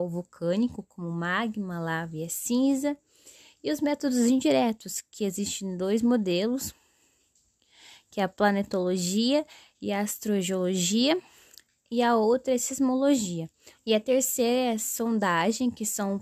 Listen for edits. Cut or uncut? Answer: cut